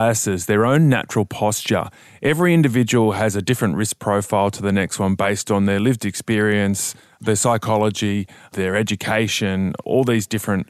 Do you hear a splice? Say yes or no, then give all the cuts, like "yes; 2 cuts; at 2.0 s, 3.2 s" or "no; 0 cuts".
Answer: no; 0 cuts